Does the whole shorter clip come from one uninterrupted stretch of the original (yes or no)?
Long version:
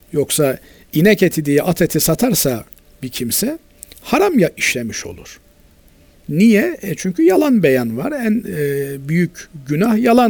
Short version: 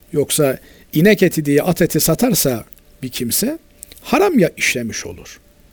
yes